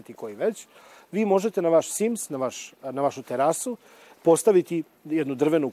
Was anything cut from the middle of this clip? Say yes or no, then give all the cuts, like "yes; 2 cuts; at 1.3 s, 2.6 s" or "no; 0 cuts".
no; 0 cuts